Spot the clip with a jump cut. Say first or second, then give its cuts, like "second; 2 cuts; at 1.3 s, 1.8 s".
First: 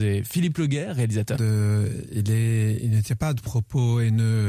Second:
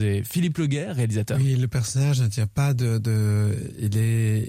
first; 1 cut; at 1.3 s